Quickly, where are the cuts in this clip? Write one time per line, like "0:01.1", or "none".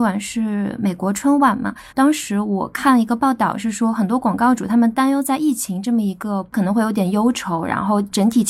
0:01.9

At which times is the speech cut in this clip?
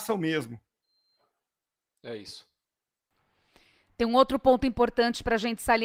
none

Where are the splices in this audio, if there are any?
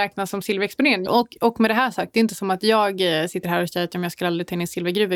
0:01.1

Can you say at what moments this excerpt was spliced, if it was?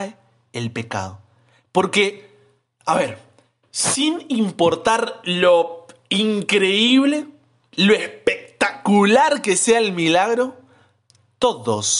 none

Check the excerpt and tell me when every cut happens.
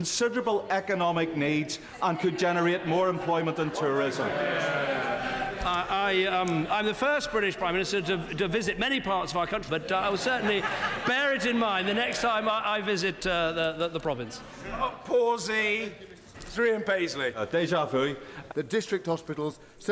0:09.7
0:16.3
0:18.5

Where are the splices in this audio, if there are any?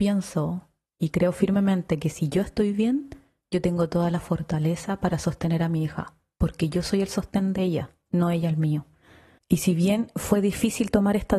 0:09.4

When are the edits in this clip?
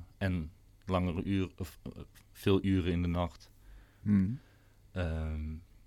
0:04.0

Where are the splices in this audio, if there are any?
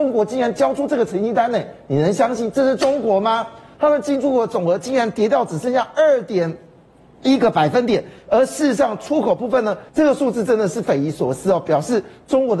0:09.9

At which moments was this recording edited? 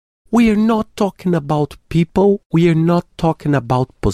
none

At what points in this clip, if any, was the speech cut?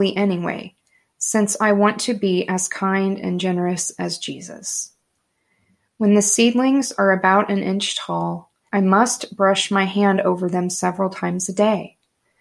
none

